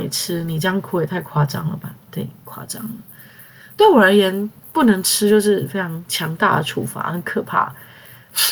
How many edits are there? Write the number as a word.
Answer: zero